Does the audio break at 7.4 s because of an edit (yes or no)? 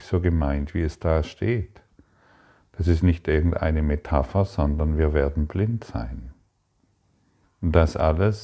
yes